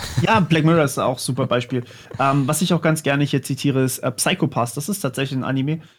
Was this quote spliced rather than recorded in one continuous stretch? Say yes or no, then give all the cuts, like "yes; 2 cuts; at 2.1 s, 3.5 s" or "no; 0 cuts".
no; 0 cuts